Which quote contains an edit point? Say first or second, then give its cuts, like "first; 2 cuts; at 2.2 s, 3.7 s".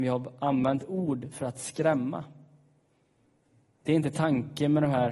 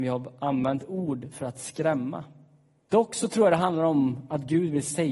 second; 1 cut; at 2.9 s